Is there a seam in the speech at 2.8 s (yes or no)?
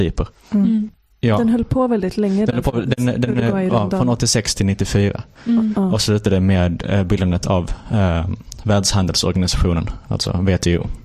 no